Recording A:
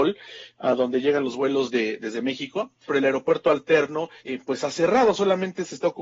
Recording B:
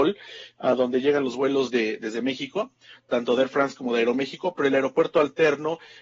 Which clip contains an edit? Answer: A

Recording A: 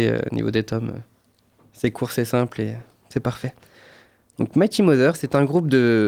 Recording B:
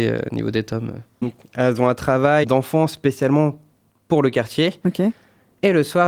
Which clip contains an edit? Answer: B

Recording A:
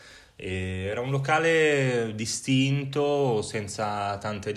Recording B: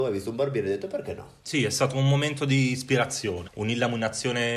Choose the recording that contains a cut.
B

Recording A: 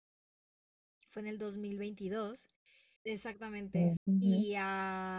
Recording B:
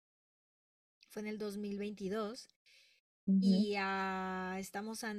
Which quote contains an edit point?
A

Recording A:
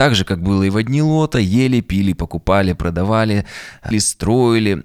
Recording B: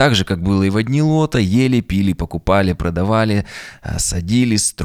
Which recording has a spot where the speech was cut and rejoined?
A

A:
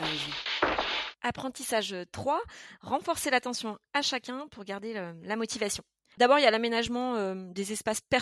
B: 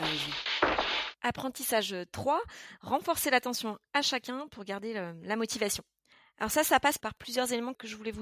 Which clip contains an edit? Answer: A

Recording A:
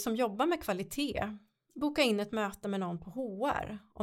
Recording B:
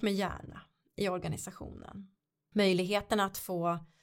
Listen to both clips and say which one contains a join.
B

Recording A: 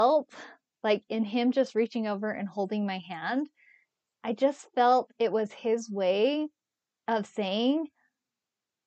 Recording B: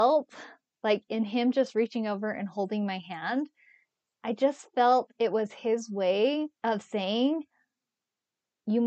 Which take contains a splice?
B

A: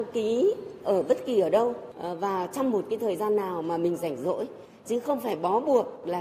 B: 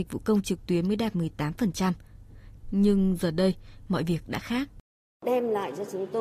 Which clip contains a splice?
B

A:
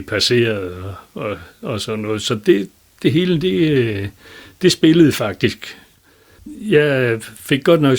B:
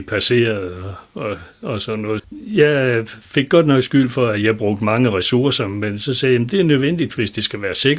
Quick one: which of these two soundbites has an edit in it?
B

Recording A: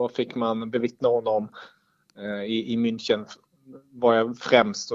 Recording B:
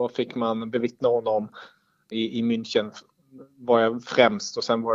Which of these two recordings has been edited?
B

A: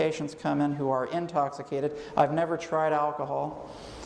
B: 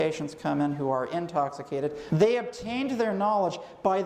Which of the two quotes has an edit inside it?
B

